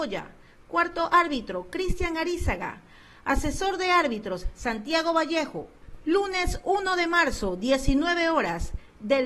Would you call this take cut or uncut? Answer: uncut